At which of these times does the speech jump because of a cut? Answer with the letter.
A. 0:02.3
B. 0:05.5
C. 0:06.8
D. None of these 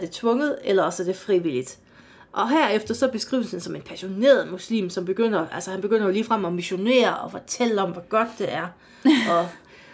D